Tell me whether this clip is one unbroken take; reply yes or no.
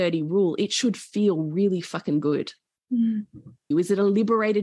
no